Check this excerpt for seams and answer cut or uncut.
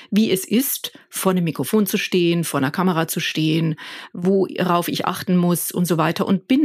uncut